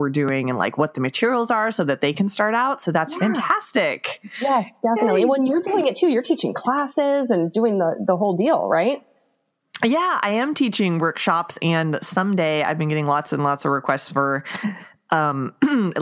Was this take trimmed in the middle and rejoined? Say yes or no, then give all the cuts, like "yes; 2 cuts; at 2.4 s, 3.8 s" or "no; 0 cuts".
no; 0 cuts